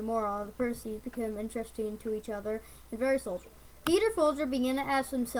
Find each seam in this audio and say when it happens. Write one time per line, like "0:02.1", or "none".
none